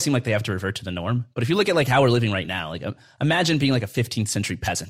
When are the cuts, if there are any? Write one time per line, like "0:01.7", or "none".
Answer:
none